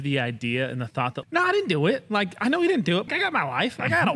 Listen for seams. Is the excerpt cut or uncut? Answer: cut